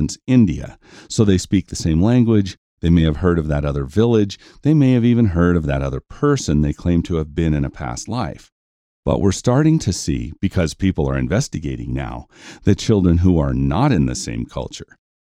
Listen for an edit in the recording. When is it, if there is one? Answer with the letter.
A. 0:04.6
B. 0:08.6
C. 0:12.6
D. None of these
D